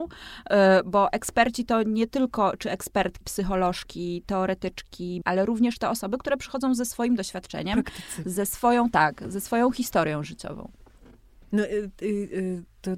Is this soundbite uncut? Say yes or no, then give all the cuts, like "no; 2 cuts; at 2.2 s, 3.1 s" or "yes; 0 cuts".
no; 2 cuts; at 3.2 s, 5.2 s